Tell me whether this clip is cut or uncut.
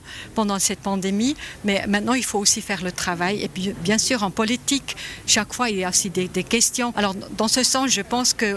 cut